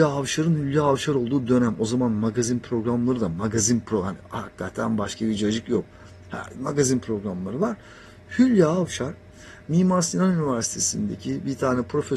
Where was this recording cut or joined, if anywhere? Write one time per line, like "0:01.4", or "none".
none